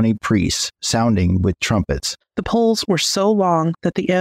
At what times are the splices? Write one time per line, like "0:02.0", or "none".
0:02.2